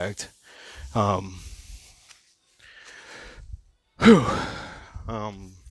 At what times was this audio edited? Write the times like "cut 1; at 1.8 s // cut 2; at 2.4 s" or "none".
none